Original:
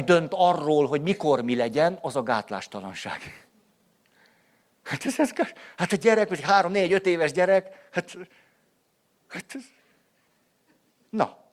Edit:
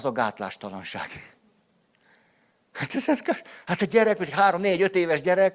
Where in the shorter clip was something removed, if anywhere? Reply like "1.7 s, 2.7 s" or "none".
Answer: none